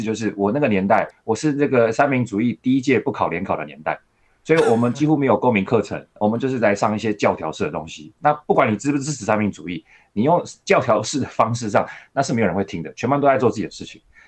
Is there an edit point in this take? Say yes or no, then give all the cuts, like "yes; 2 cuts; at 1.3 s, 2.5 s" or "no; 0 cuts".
yes; 1 cut; at 1.1 s